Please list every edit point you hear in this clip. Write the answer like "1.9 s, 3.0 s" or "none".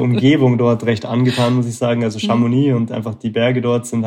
none